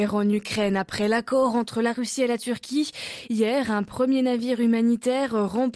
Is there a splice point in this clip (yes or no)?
no